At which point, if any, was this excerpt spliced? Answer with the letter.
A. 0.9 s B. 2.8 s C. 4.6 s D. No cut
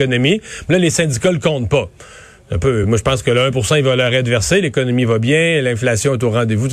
D